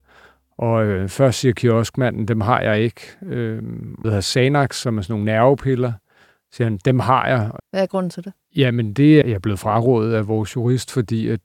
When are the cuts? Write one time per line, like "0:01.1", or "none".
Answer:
0:04.0
0:07.6
0:09.2